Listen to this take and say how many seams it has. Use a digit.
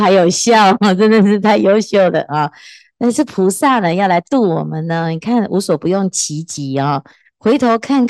0